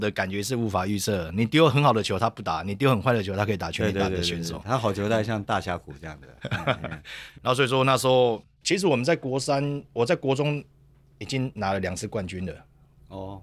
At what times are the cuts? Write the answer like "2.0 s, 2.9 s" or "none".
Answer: 7.3 s